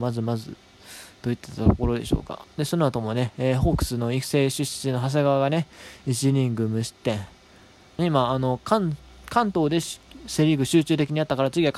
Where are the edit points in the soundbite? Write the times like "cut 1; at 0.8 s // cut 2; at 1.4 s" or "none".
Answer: cut 1; at 8.0 s